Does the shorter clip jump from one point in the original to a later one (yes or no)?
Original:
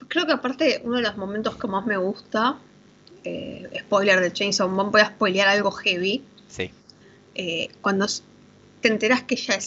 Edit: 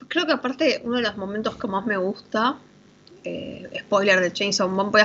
no